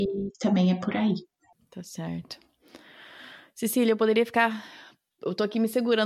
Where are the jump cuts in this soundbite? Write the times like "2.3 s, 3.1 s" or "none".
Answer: none